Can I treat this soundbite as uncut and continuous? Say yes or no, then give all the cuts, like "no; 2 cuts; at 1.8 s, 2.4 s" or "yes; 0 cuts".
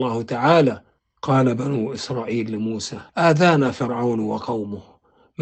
no; 1 cut; at 3.1 s